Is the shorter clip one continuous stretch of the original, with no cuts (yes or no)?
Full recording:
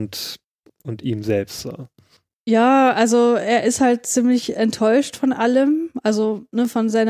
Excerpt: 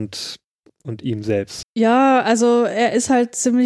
no